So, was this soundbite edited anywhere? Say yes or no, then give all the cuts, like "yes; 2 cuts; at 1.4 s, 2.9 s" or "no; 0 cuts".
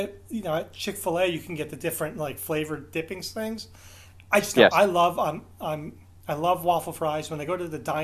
no; 0 cuts